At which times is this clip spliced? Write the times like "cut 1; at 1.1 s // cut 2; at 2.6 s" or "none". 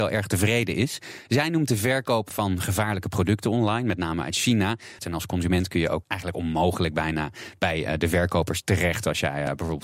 cut 1; at 5.0 s // cut 2; at 6.0 s